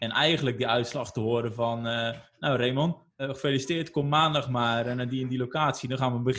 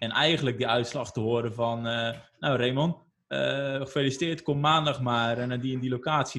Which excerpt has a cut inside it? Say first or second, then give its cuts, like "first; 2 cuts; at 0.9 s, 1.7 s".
first; 1 cut; at 3.2 s